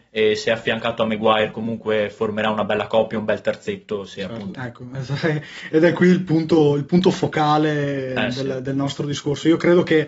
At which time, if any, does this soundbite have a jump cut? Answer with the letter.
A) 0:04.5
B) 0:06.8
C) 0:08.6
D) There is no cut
A